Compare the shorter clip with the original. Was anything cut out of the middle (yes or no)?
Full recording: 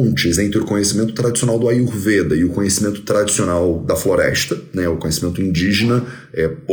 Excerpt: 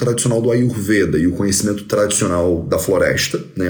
no